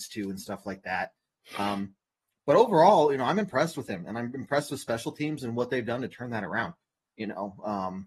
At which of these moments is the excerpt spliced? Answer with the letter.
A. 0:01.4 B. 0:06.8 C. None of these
C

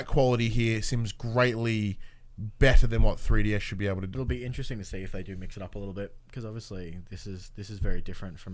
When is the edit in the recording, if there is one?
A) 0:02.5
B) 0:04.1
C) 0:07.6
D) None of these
B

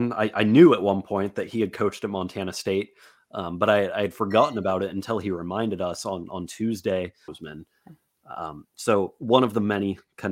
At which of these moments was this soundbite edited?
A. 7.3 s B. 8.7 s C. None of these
A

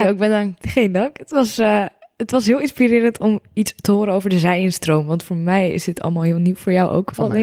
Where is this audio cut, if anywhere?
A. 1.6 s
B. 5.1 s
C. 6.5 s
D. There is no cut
D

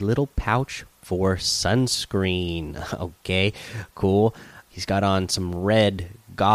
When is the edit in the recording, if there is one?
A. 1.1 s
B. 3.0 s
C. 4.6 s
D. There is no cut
C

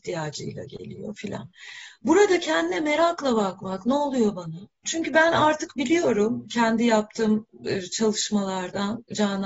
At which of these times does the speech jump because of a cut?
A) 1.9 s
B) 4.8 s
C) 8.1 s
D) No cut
B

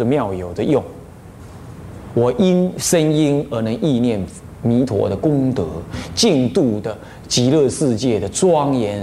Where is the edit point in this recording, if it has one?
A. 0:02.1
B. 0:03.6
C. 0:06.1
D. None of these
A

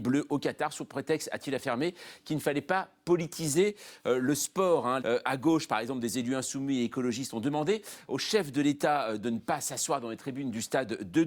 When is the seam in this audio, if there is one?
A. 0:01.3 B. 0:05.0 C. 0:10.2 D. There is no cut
B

